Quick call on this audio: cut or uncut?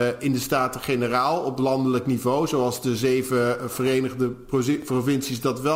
cut